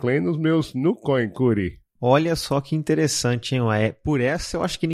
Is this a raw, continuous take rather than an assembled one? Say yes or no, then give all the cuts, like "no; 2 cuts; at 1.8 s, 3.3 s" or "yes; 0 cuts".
yes; 0 cuts